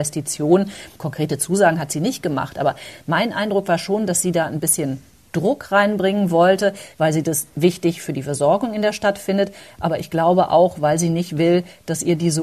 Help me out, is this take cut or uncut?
cut